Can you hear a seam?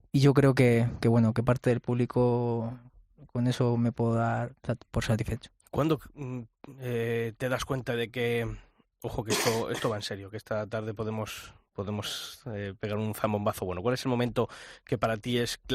no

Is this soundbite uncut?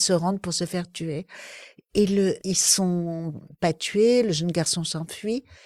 no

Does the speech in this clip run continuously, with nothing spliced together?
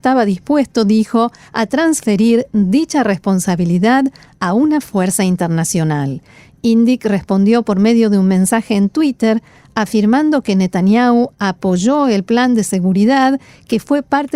yes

